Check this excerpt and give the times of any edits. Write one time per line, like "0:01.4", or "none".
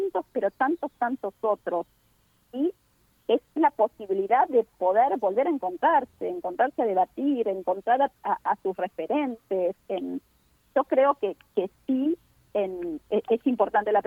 none